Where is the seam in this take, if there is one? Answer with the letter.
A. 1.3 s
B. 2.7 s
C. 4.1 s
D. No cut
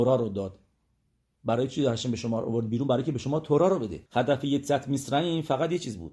C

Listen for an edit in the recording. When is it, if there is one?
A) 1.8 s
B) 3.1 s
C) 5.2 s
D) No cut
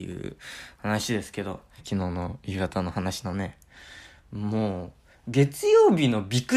A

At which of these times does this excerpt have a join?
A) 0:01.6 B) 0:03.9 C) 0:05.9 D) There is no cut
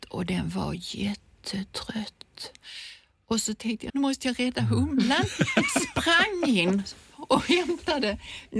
B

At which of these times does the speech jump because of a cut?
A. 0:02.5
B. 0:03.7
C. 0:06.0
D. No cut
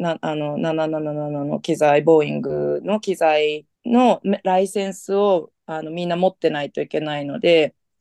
B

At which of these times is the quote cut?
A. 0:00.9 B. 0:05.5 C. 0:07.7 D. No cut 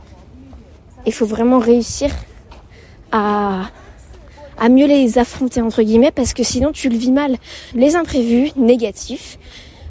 C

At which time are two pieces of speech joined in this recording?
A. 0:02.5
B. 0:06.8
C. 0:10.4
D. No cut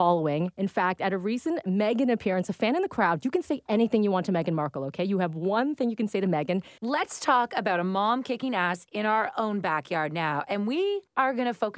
B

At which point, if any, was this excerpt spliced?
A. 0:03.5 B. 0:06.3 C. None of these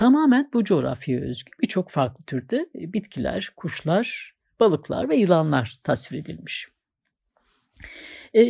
C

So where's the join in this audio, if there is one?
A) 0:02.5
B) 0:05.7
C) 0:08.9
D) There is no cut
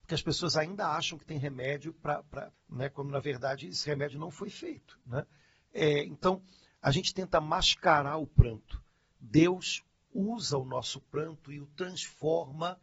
A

